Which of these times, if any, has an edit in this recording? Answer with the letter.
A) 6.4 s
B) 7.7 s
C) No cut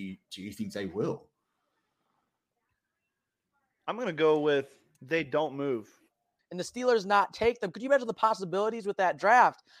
A